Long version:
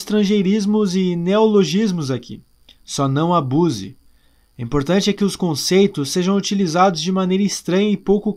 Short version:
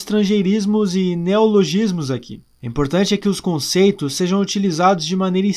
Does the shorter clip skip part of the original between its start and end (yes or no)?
yes